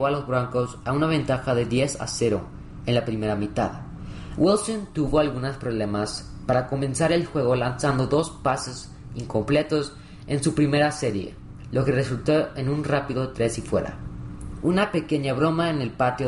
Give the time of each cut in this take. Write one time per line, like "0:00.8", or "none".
0:04.4
0:14.6

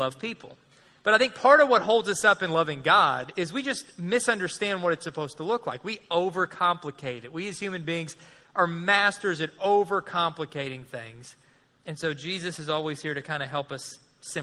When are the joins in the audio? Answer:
none

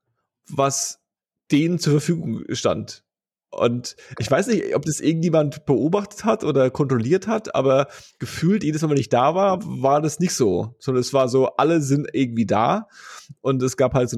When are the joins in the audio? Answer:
none

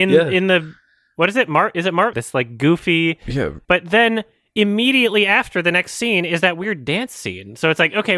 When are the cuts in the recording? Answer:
0:02.1
0:03.6

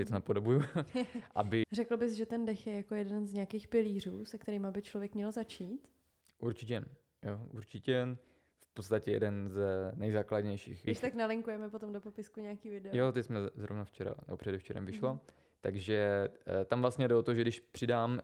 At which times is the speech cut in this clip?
0:01.6
0:10.9

